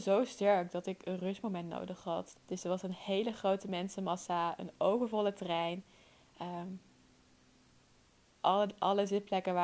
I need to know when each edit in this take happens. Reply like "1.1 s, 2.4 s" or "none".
2.3 s

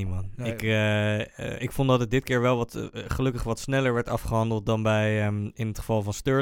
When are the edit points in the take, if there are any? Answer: 1.6 s

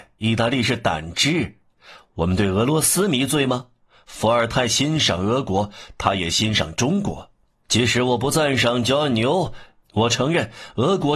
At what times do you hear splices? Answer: 7.6 s, 9.8 s

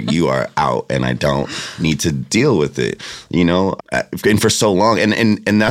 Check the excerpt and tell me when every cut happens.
3.8 s

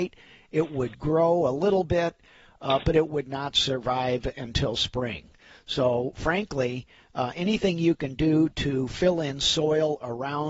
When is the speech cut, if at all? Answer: none

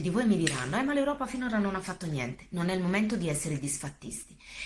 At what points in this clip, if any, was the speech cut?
none

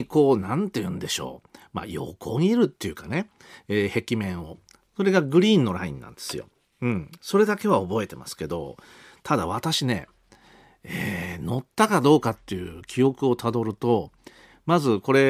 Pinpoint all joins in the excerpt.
none

